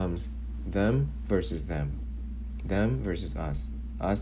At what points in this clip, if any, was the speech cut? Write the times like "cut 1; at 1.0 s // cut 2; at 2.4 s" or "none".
none